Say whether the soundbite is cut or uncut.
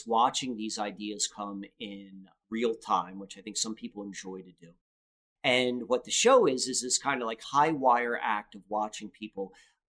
cut